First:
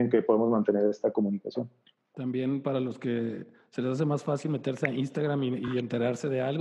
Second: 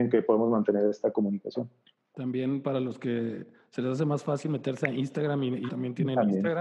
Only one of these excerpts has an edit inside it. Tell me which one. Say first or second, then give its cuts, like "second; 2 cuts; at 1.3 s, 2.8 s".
second; 1 cut; at 5.7 s